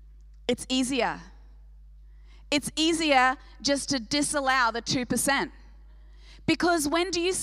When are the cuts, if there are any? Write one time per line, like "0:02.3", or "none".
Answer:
none